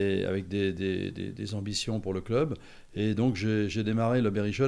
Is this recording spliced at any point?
no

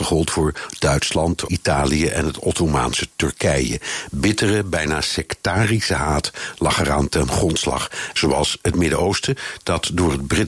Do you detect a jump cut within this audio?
yes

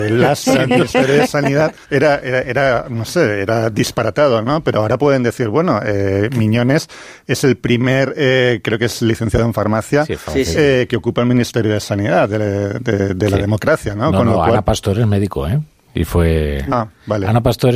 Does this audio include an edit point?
yes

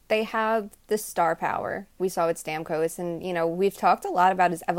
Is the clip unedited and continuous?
no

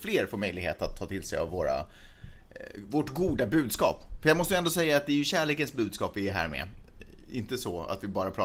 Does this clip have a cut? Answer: no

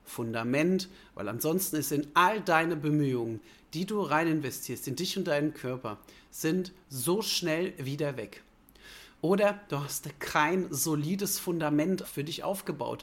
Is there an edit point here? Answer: yes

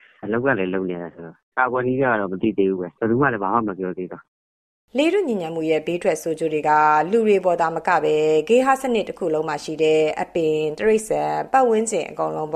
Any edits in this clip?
yes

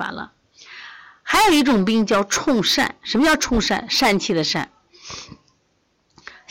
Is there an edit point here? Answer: no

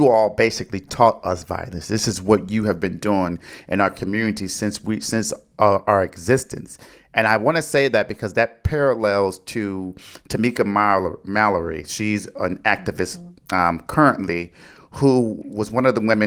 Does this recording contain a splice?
no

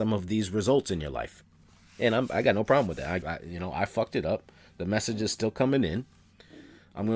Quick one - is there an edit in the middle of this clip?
yes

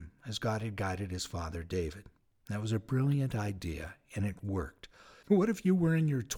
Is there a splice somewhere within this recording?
yes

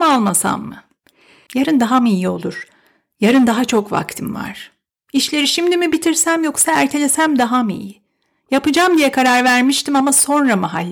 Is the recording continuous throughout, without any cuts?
no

